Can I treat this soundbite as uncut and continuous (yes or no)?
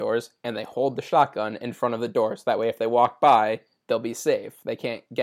yes